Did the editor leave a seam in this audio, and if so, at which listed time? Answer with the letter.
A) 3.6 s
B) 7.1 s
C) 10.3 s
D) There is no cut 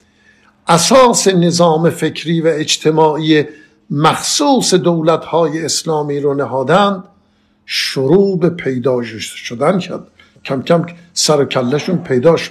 D